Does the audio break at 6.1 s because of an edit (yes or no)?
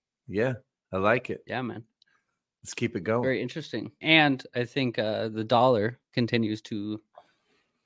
yes